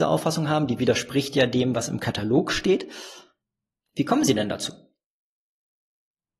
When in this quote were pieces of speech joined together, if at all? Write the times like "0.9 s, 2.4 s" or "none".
none